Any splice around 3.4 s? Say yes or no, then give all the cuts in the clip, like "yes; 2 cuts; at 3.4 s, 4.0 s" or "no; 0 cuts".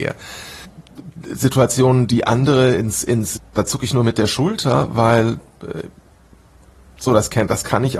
yes; 1 cut; at 3.4 s